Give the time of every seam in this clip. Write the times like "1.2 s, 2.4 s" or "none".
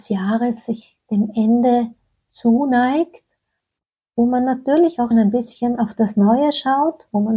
5.1 s

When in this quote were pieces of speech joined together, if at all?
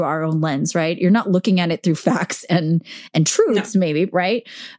none

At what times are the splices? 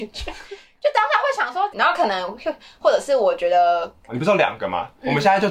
1.7 s, 4.1 s

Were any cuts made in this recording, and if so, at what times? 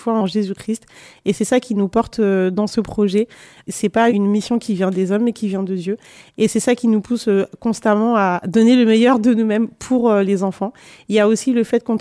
none

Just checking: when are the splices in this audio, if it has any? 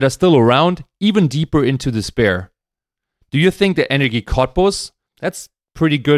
5.1 s

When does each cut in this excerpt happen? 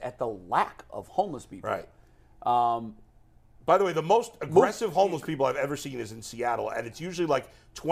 none

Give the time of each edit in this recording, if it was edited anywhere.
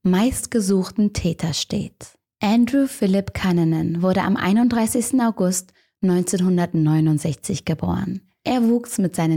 none

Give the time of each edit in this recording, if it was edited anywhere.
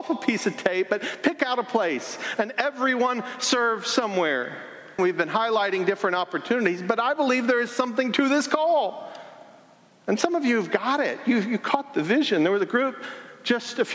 5.0 s

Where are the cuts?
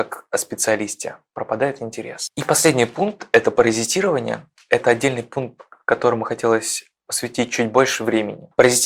none

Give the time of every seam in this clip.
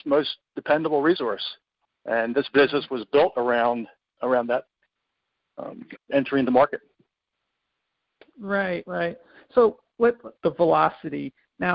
6.0 s, 10.4 s

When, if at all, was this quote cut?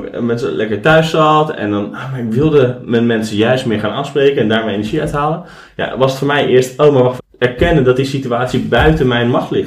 7.2 s

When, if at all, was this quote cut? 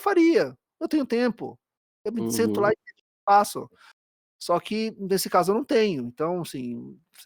none

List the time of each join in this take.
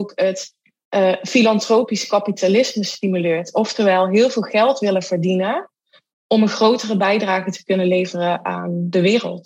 none

